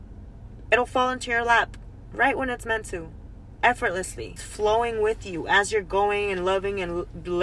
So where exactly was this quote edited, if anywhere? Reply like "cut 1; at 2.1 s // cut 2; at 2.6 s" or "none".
cut 1; at 4.4 s